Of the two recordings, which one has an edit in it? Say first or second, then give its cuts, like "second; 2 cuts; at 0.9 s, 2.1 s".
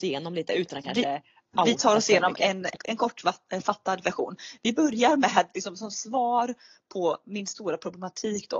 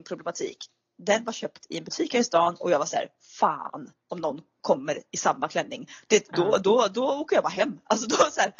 first; 1 cut; at 2.8 s